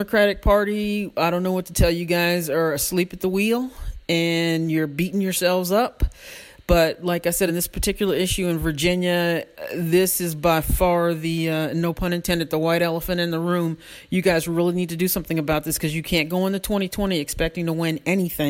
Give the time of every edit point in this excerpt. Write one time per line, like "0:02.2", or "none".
none